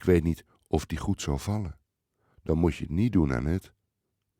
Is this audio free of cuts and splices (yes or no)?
yes